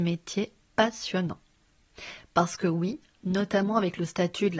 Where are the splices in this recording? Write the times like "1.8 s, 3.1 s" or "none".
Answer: none

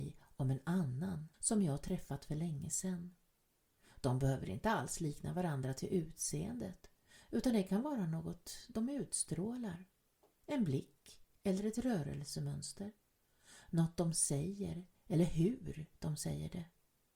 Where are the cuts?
1.3 s

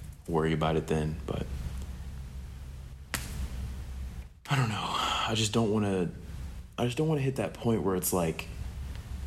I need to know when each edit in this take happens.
none

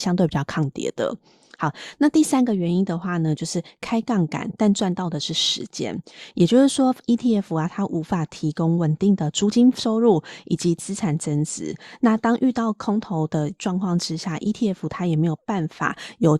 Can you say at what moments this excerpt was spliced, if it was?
6.3 s

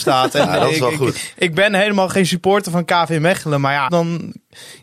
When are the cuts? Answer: 3.9 s

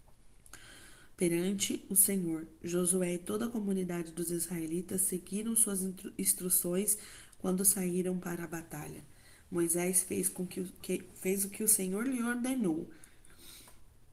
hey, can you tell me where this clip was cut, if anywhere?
none

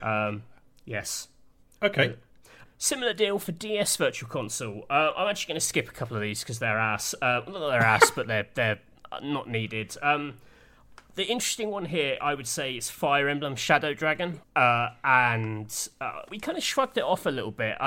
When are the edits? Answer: 2.7 s, 14.4 s, 16.3 s

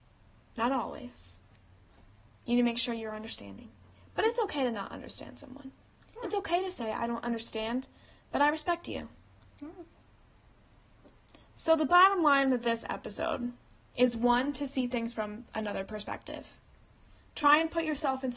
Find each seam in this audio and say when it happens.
none

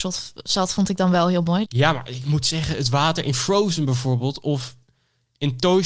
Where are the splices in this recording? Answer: 1.7 s

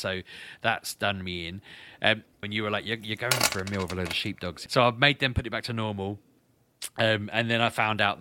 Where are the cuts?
2.4 s, 4.7 s

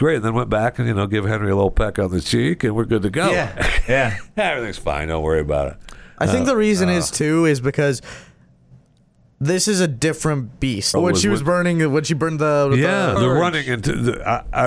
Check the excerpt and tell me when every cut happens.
10.9 s, 13.2 s

